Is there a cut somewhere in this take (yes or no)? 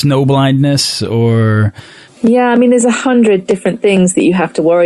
no